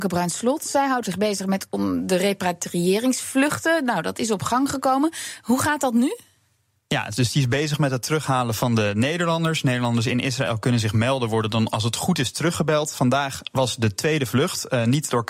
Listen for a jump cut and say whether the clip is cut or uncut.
uncut